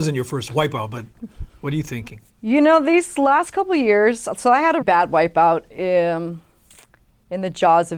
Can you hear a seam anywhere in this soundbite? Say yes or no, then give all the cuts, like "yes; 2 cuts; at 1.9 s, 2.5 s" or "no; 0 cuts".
yes; 2 cuts; at 2.3 s, 4.8 s